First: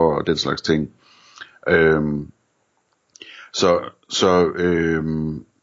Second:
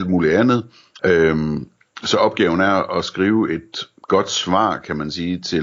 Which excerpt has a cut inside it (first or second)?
second